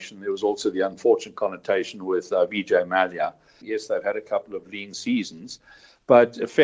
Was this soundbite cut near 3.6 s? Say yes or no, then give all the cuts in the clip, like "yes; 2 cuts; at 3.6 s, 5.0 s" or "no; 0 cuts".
yes; 1 cut; at 3.6 s